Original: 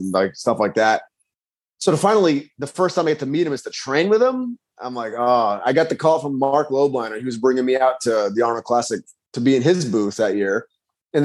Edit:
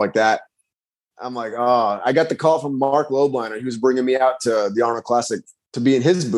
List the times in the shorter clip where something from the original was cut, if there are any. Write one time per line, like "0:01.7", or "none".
0:01.1